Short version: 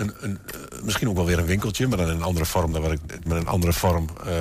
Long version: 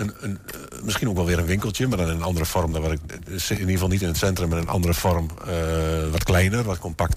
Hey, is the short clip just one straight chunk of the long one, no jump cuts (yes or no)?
no